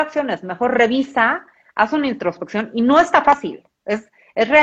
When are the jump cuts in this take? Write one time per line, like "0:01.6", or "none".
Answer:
0:03.7